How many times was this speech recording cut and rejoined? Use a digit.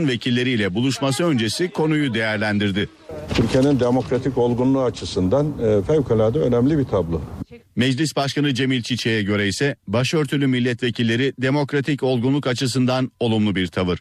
2